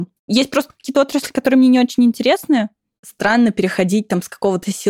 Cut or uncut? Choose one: cut